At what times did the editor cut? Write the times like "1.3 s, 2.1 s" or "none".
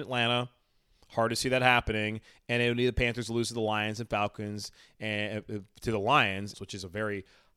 6.5 s